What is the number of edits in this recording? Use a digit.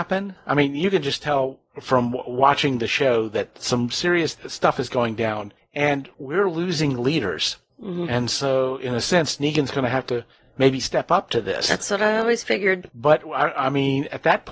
0